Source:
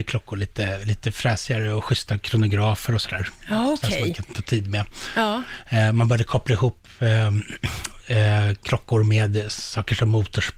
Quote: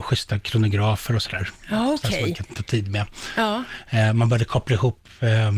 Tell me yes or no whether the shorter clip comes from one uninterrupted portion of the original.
yes